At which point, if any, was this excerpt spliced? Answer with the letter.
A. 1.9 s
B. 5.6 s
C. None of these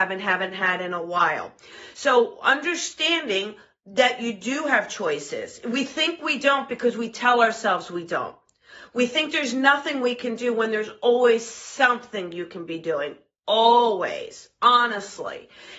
C